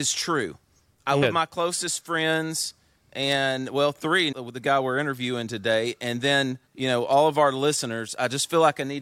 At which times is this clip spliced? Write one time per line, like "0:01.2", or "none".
0:01.2
0:04.3
0:06.7

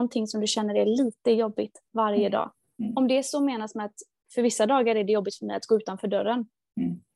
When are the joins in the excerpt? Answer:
none

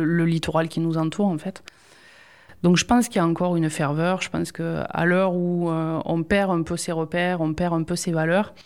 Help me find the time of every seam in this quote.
none

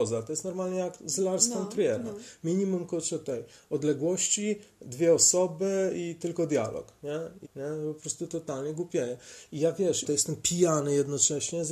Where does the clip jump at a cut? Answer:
0:07.4
0:10.0

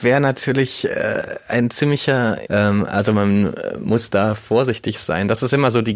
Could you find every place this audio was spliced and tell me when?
0:02.5

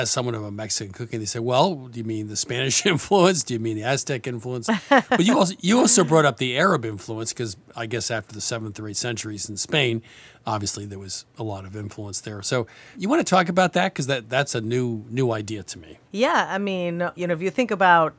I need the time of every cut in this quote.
0:12.9
0:16.1

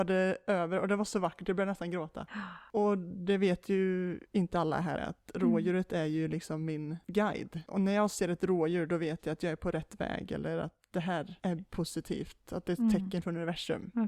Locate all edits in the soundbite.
0:05.0

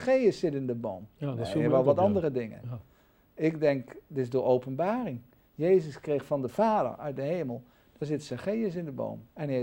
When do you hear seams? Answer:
none

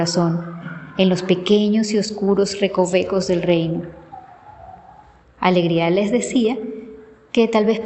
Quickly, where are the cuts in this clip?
0:05.2

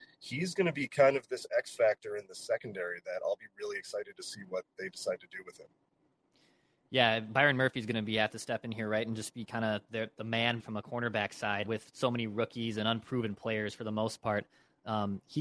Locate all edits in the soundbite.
0:10.6
0:11.6

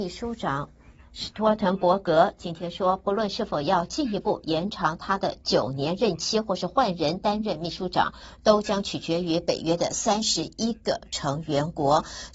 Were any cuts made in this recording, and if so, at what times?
none

